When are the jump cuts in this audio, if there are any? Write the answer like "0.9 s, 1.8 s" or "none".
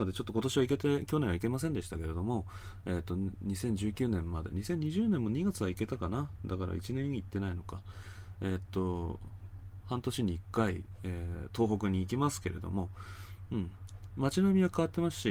none